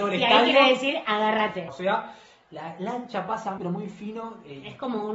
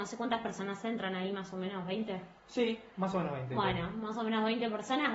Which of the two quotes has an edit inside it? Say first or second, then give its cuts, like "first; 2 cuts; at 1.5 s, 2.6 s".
first; 2 cuts; at 1.7 s, 3.6 s